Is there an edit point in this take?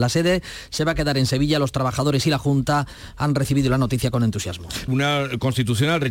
yes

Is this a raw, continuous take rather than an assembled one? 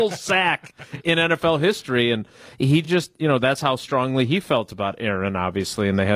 yes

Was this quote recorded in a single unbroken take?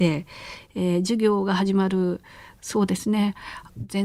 yes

